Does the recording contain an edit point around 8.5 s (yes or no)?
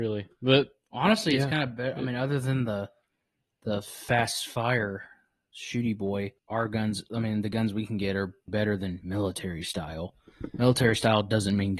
yes